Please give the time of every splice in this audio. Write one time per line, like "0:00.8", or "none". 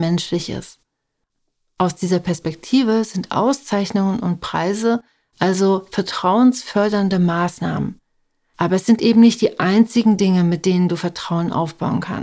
none